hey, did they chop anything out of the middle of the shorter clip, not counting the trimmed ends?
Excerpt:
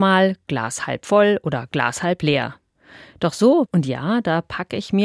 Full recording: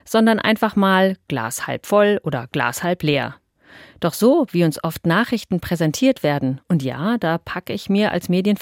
yes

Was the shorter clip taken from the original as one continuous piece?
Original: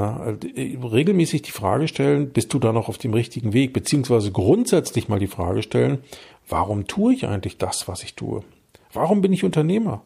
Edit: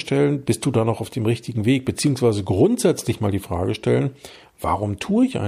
yes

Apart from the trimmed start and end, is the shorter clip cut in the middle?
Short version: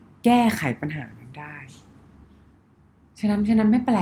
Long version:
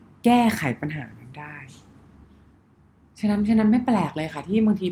no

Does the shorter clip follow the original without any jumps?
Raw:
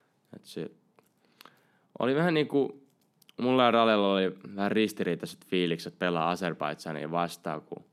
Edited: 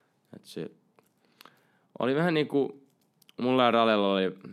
yes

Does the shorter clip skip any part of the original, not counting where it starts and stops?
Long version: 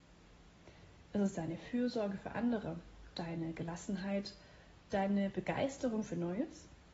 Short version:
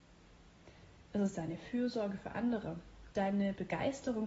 yes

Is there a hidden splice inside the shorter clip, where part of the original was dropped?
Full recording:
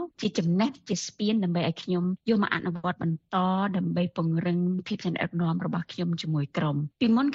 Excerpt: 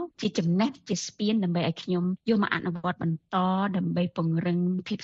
no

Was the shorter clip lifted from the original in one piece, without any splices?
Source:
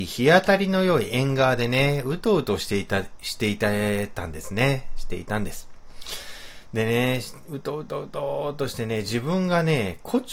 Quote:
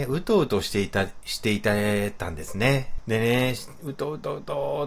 no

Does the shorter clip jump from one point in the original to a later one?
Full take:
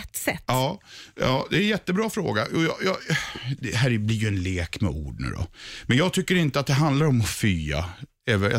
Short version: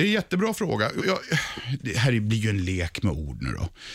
yes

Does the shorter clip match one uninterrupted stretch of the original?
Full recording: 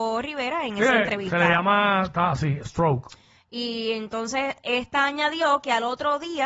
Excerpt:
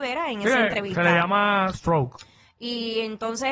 no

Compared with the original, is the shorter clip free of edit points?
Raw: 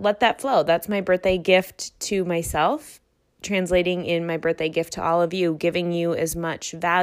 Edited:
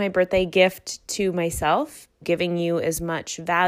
no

